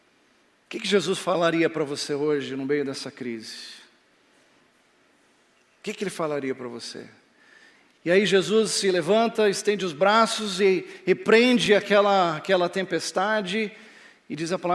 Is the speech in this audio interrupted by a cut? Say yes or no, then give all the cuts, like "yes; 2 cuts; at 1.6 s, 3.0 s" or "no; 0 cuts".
no; 0 cuts